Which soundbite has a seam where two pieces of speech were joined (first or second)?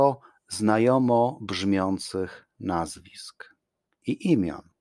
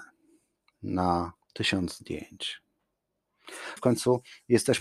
second